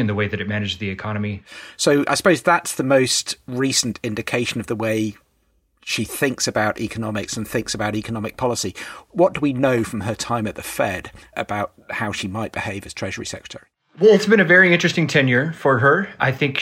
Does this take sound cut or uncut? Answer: uncut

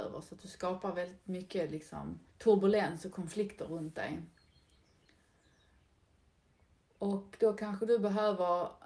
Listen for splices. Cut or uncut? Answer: cut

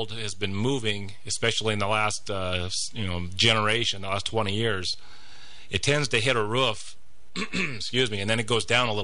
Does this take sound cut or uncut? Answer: uncut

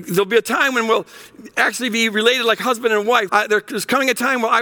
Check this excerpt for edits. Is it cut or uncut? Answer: cut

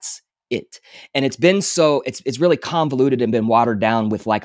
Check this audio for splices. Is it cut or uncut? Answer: uncut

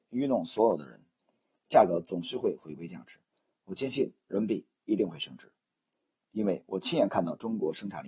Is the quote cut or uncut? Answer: uncut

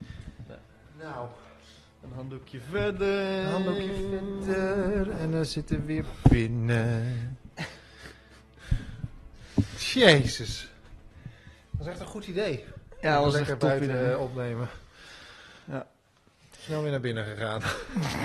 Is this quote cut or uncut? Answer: uncut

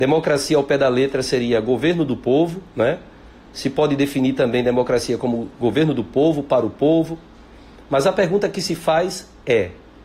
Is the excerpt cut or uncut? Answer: uncut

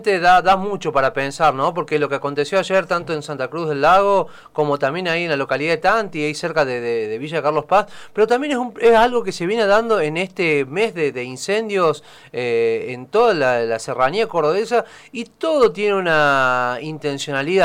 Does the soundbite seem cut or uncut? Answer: uncut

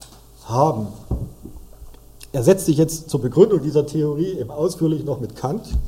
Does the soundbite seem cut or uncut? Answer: uncut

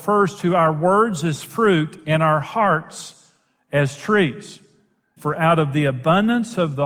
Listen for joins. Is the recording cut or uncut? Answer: cut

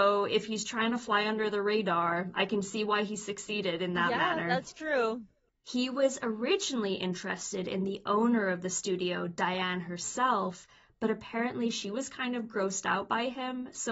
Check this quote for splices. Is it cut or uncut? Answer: uncut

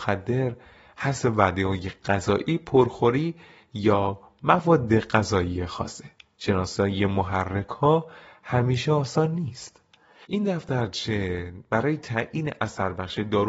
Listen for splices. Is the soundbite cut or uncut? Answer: cut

